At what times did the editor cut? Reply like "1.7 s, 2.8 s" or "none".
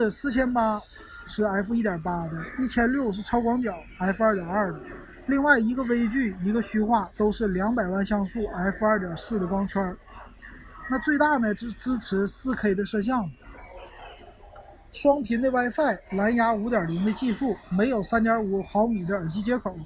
none